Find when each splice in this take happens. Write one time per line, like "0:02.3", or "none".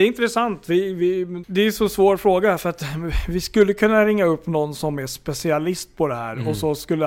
0:01.4